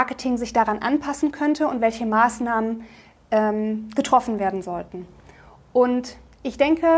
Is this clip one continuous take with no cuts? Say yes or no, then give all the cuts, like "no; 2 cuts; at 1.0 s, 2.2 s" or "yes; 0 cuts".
yes; 0 cuts